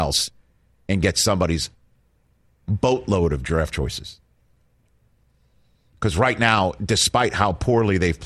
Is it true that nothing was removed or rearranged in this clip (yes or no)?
yes